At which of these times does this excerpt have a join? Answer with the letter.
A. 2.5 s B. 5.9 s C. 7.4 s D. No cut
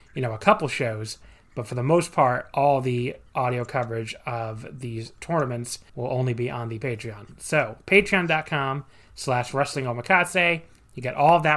B